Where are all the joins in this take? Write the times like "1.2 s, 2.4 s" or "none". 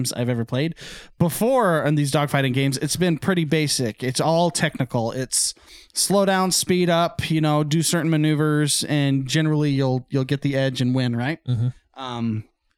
none